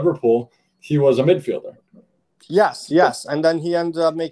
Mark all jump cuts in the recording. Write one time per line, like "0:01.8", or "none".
none